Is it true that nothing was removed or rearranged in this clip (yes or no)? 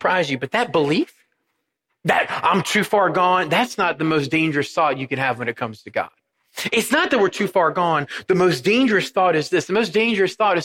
yes